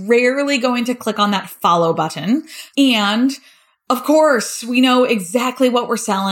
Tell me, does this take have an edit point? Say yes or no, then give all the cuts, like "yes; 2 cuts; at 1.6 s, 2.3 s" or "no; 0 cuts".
yes; 1 cut; at 2.7 s